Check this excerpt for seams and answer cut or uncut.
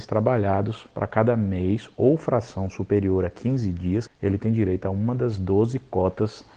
cut